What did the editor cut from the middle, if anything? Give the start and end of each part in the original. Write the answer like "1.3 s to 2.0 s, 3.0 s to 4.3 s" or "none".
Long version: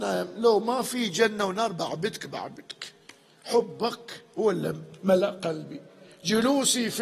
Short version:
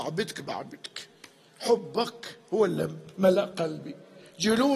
none